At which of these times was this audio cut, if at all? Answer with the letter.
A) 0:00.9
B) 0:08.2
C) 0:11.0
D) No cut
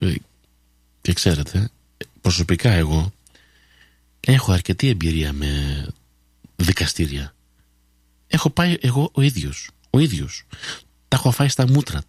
B